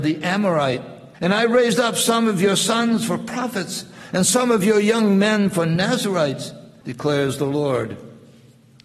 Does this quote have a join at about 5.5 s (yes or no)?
no